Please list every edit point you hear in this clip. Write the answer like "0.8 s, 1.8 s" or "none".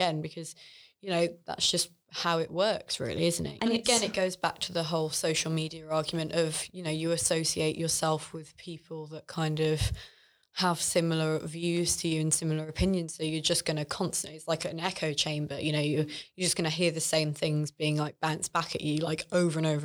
3.6 s